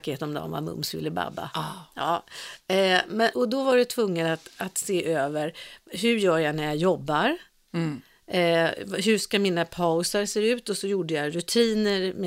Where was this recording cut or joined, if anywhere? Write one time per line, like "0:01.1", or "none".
0:03.3